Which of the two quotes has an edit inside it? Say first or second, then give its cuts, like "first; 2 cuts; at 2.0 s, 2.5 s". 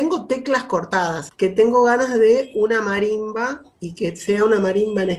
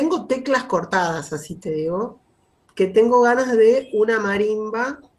first; 1 cut; at 1.3 s